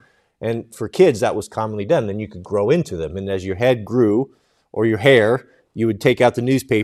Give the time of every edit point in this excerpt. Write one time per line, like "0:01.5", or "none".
none